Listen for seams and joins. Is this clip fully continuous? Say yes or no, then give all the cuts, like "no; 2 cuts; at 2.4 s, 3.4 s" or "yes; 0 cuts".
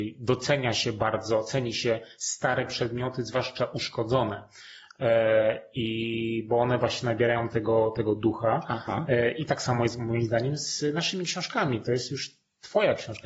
yes; 0 cuts